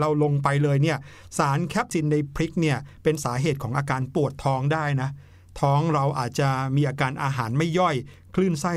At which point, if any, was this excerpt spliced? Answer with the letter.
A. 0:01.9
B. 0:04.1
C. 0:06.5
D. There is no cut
A